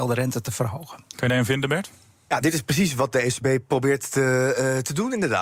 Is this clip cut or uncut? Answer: uncut